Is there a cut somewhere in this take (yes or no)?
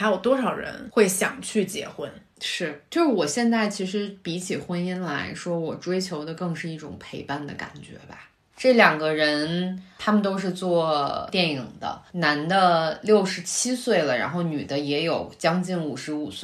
yes